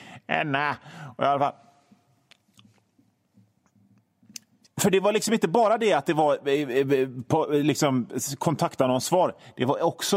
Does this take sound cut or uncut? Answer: cut